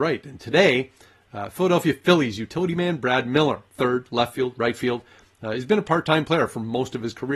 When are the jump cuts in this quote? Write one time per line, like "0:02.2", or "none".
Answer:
0:03.7